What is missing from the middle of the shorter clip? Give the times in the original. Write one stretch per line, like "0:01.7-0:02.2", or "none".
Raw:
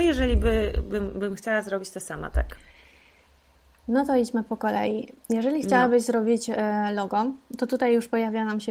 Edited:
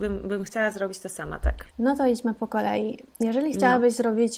0:02.6-0:03.8